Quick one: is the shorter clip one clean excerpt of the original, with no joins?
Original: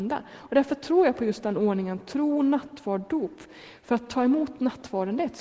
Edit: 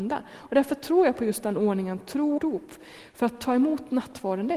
no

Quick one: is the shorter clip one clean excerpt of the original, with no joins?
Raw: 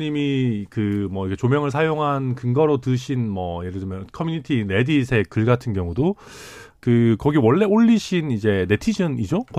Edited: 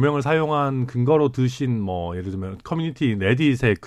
yes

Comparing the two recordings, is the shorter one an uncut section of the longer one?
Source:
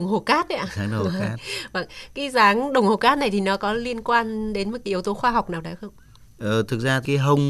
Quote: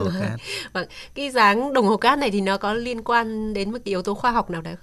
yes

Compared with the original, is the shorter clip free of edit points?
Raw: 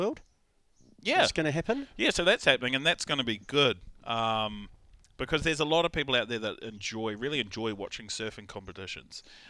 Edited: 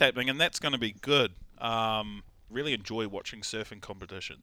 no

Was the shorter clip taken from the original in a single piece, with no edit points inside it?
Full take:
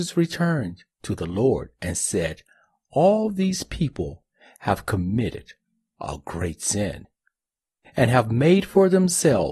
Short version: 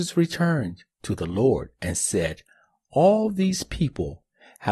yes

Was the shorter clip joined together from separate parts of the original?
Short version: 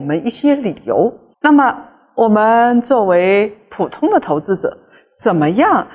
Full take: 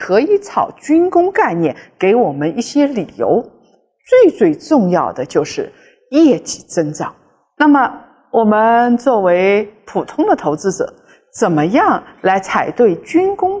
yes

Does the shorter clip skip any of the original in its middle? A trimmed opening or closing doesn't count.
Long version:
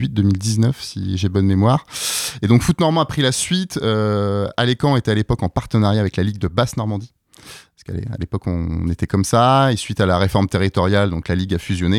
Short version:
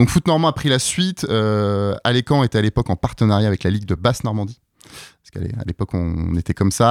no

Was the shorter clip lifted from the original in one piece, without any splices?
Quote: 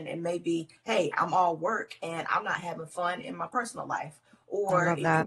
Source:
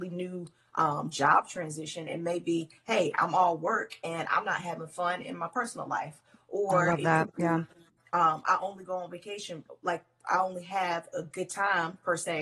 yes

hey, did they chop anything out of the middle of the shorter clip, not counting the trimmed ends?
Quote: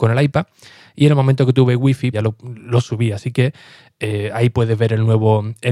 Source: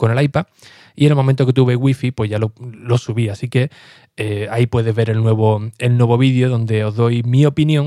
yes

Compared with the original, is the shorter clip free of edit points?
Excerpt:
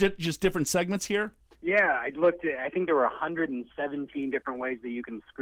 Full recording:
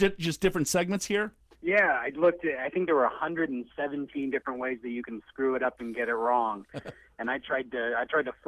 yes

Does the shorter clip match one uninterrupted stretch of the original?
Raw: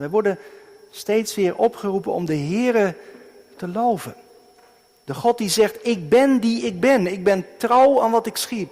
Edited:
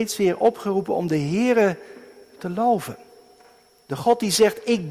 yes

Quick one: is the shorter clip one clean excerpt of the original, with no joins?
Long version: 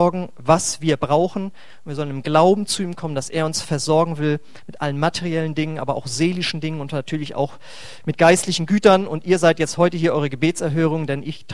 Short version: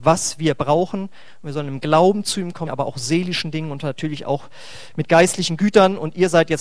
no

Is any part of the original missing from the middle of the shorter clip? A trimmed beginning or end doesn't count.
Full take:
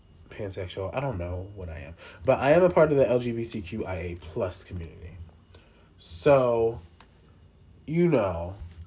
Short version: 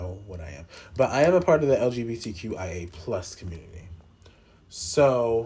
no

